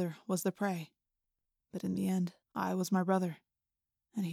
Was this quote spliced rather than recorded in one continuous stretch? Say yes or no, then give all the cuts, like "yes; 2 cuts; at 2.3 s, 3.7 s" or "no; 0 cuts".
yes; 1 cut; at 2.4 s